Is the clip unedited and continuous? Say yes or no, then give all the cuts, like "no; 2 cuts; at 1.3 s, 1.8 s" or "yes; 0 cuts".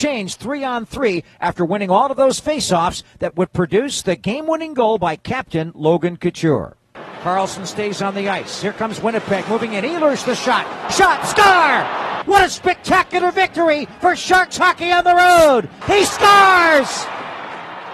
no; 3 cuts; at 10.8 s, 12.2 s, 15.8 s